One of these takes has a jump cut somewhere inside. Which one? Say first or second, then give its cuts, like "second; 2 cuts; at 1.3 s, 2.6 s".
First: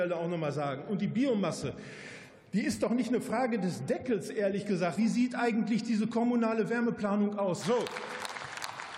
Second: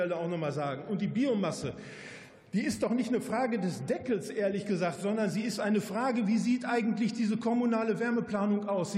first; 2 cuts; at 5.0 s, 7.6 s